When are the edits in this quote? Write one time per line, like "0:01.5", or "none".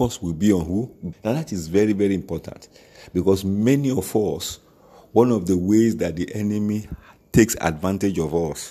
0:01.1